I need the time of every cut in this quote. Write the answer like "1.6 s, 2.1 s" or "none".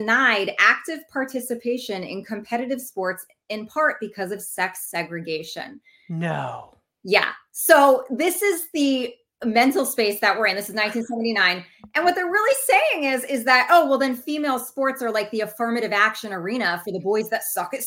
none